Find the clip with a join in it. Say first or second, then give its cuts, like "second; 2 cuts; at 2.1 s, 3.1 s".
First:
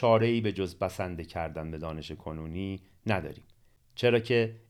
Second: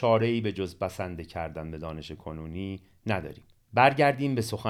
second; 1 cut; at 3.6 s